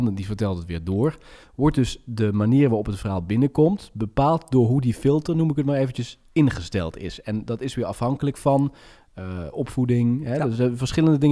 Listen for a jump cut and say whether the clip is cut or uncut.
uncut